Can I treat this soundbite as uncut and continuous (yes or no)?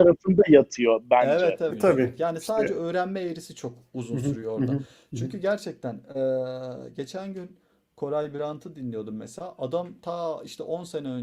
no